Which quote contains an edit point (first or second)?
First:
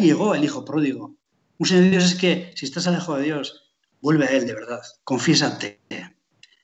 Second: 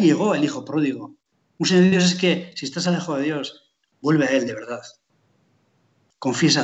first